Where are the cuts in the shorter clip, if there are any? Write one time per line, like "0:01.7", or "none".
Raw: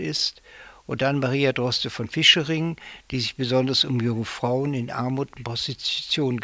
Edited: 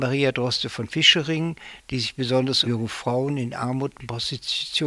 0:02.6